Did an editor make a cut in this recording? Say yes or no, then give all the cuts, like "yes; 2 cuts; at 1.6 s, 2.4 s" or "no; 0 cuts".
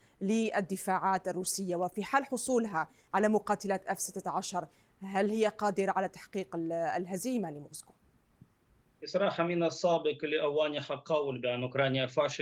no; 0 cuts